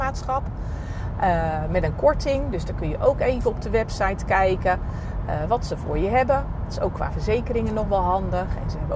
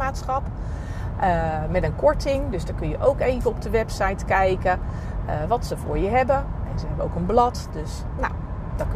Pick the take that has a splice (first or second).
second